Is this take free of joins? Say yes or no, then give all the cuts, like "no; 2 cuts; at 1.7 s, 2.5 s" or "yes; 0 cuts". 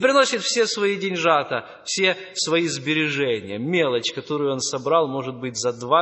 yes; 0 cuts